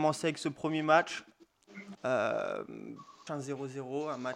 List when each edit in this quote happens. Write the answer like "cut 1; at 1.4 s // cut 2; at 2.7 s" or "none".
cut 1; at 1.9 s // cut 2; at 3.3 s